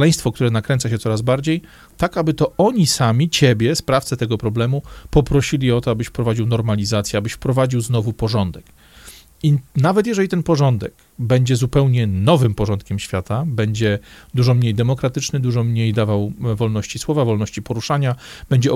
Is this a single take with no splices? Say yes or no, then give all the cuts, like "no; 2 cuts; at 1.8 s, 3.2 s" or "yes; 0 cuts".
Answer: yes; 0 cuts